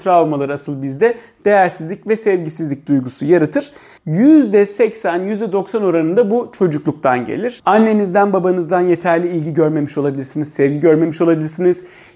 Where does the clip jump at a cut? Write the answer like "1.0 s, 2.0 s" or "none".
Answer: 4.0 s, 7.6 s